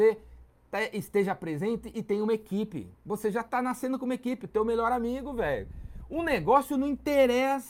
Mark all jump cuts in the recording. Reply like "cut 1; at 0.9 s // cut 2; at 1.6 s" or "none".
none